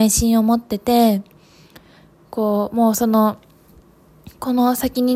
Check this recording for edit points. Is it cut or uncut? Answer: uncut